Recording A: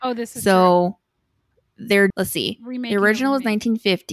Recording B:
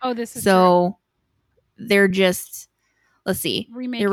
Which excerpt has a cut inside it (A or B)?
A